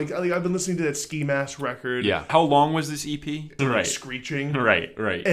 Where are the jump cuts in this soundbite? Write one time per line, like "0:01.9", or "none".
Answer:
0:02.3
0:03.6